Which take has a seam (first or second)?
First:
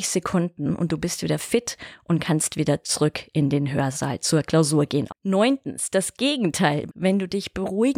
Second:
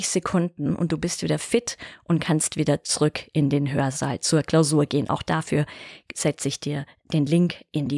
first